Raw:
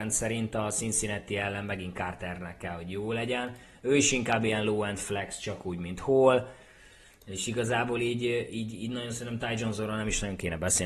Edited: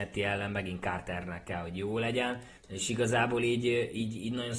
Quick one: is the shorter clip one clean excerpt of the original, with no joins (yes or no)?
no